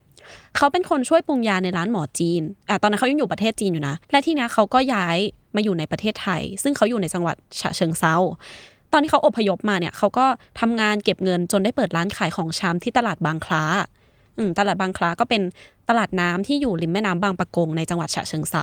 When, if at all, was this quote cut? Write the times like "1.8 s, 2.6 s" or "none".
4.0 s

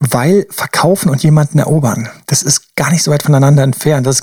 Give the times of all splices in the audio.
none

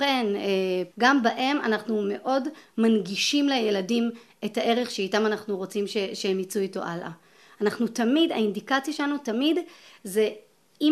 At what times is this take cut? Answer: 0.9 s

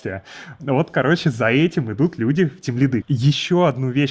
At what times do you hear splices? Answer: 3.0 s

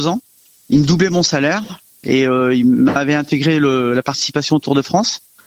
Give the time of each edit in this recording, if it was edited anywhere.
none

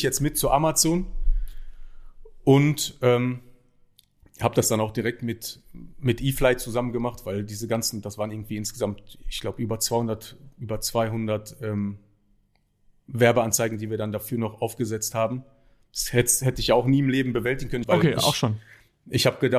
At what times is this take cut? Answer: 17.8 s

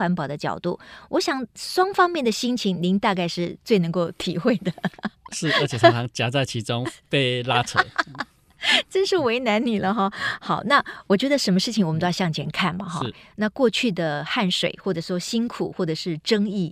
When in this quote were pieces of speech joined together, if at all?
none

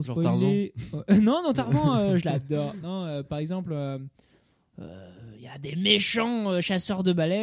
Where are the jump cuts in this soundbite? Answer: none

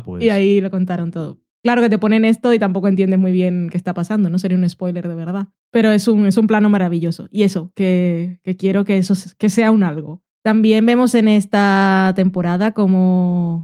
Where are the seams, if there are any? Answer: none

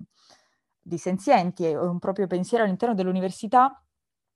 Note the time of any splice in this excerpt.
none

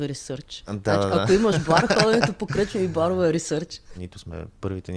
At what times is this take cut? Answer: 3.9 s

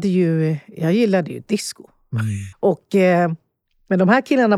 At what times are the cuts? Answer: 2.5 s

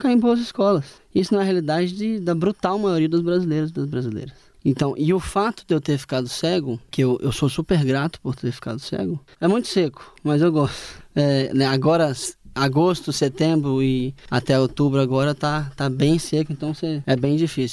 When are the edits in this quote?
9.3 s

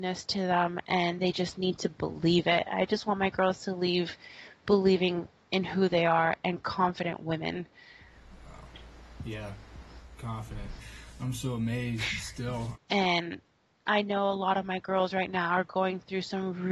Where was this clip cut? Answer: 10.8 s, 12.7 s

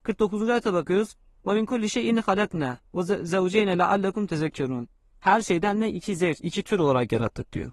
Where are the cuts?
6.4 s

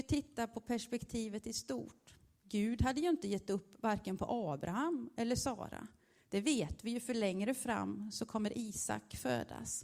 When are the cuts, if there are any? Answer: none

